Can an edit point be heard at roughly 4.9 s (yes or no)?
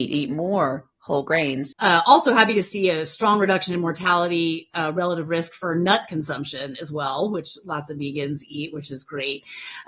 no